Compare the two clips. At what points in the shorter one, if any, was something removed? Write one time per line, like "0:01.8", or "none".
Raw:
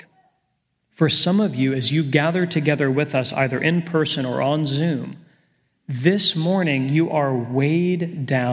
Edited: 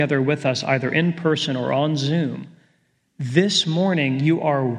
none